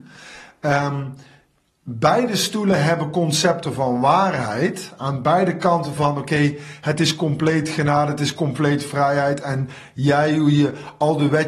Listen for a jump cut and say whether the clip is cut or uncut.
uncut